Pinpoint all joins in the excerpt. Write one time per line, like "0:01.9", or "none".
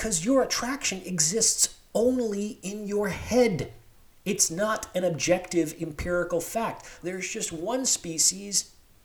0:07.0